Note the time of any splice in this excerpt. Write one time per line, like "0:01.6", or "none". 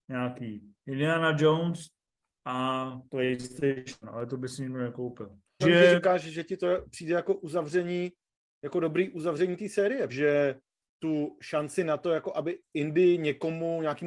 0:03.1
0:05.6
0:10.1